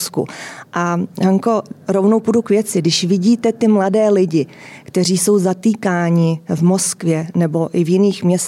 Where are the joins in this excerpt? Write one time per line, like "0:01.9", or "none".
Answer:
0:01.8